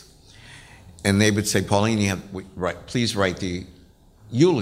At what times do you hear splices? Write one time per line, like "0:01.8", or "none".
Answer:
none

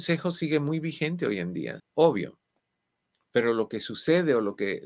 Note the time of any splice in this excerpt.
0:01.8

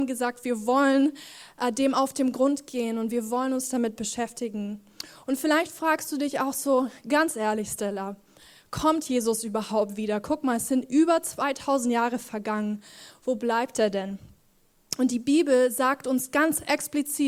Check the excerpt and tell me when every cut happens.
none

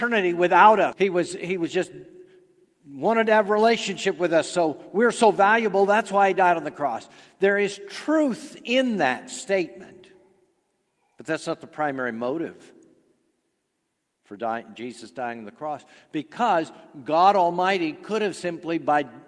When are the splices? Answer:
0:00.9

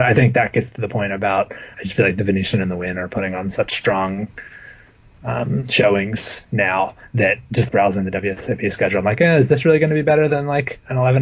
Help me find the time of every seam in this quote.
0:01.7
0:07.7

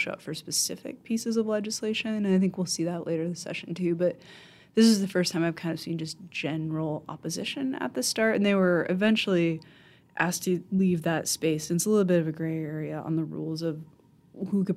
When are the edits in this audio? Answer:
none

